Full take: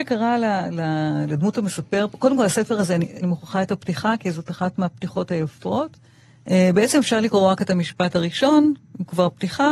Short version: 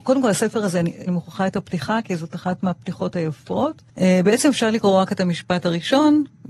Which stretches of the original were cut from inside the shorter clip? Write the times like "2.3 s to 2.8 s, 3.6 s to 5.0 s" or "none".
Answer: 6.0 s to 6.4 s

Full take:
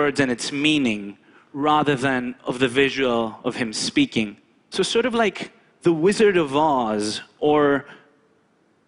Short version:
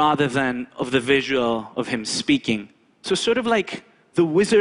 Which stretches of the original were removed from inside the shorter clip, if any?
none

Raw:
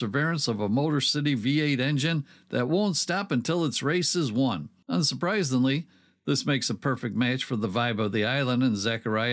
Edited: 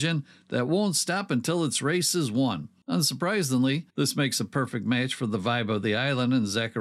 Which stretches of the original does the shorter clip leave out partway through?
5.9 s to 6.2 s

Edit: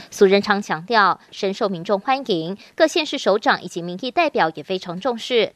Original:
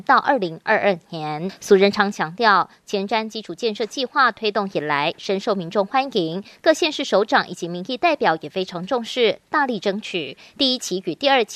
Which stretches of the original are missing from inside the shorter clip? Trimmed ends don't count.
2.8 s to 5.1 s

